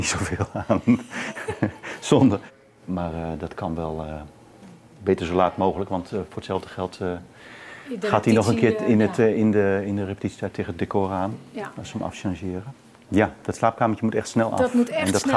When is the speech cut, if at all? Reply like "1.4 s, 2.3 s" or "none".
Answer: 13.1 s